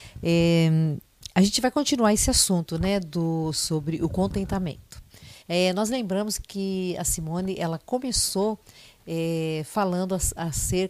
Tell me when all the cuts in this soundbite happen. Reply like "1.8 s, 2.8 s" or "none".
5.4 s